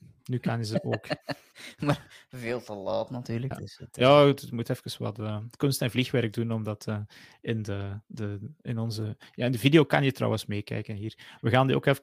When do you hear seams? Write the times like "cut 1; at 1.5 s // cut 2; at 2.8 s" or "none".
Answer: cut 1; at 3.5 s